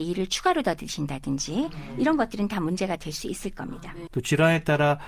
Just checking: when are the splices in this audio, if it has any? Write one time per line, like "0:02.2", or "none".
0:04.1